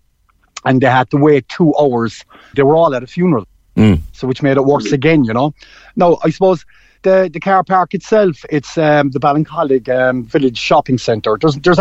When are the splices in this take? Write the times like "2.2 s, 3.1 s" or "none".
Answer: 2.5 s